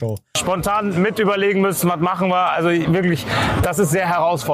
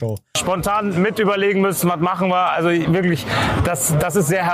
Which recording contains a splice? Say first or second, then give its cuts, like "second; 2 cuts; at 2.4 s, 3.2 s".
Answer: first; 1 cut; at 3.6 s